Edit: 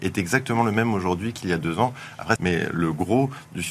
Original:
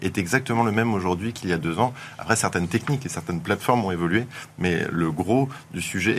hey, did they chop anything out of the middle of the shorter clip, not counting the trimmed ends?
yes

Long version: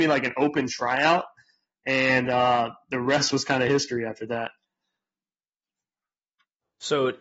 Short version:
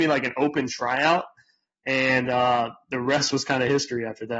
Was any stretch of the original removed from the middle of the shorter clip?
no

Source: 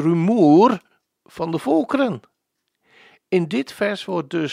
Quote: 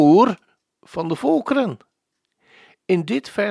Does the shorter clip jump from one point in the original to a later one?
no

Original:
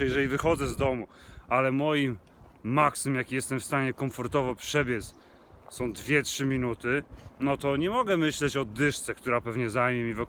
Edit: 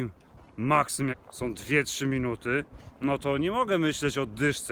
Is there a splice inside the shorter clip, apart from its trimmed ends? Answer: yes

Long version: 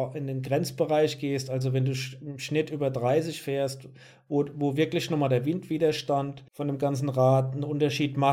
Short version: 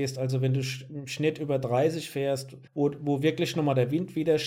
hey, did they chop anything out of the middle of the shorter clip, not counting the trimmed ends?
yes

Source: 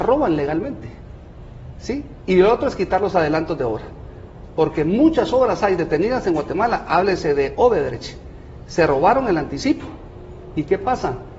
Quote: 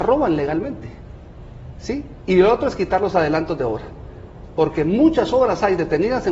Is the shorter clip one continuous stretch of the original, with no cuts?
yes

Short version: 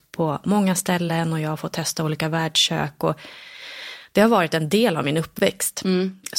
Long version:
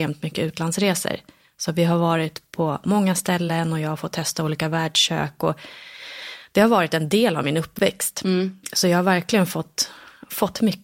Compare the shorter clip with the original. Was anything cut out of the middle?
no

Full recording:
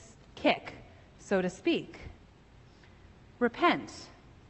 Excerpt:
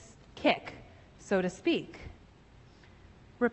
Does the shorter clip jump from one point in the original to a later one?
no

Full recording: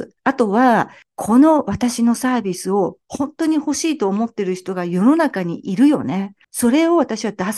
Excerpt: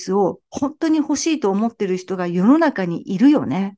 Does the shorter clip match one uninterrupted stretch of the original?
yes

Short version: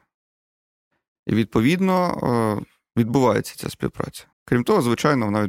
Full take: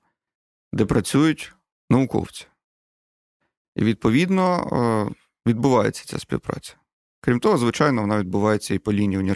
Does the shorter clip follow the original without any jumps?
no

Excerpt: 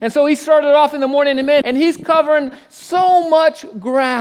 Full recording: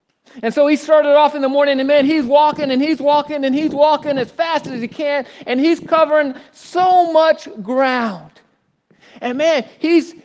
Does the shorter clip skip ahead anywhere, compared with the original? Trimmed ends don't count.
yes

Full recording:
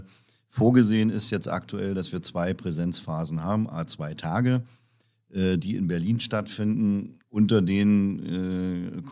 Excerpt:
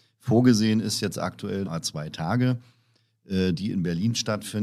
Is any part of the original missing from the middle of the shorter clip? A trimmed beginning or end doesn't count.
yes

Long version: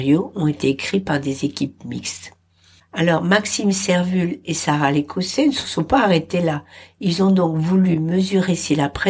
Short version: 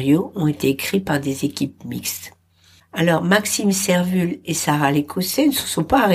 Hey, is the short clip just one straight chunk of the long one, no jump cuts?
yes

